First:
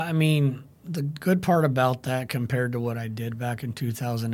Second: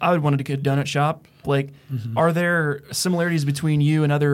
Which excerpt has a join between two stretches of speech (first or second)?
second